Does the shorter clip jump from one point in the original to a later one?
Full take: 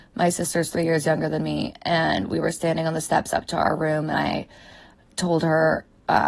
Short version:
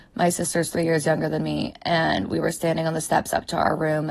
no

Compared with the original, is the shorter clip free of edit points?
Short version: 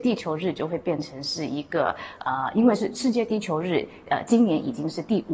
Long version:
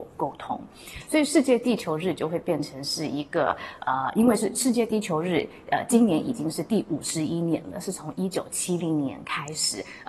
yes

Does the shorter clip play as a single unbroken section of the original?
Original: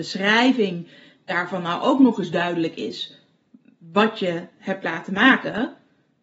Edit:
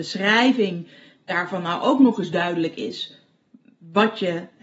yes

